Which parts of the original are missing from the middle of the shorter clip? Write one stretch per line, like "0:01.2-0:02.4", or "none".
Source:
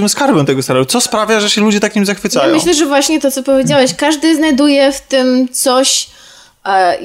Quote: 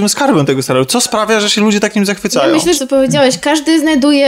0:02.7-0:03.3